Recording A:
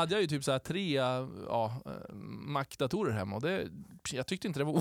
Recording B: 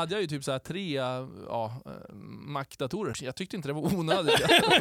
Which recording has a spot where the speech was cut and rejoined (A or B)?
B